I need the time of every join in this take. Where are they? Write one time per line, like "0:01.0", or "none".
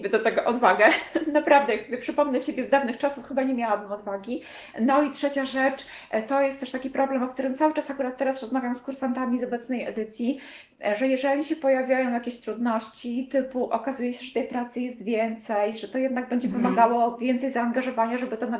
none